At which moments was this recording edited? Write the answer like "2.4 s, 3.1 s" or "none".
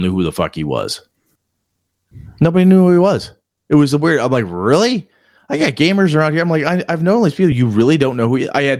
none

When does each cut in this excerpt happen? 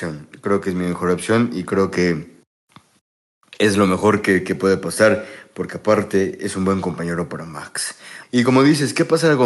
8.2 s

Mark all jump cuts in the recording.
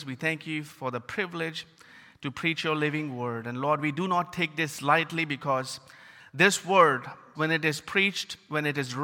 7.3 s

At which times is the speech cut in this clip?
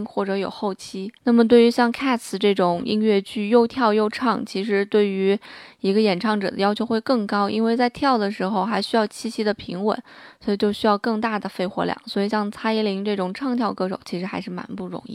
none

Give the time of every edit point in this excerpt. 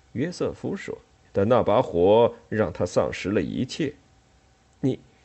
1.2 s

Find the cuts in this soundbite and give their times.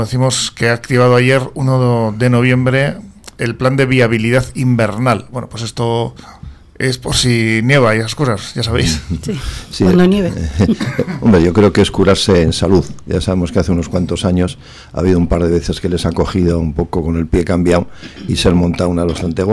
none

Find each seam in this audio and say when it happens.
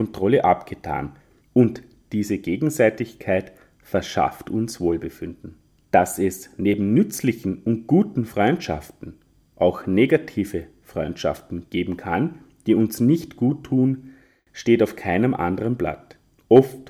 1.4 s

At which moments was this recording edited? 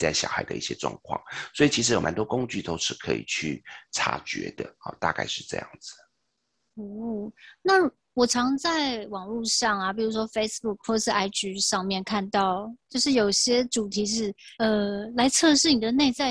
12.8 s, 14.5 s

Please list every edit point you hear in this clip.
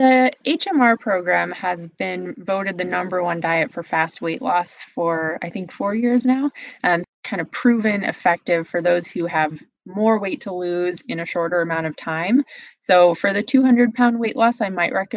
7.0 s

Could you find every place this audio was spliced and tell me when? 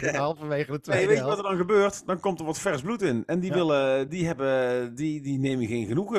none

